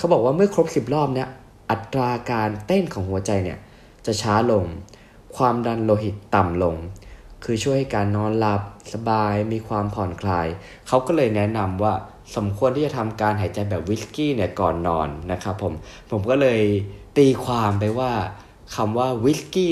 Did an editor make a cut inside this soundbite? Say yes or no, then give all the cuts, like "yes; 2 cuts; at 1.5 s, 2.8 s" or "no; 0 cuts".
no; 0 cuts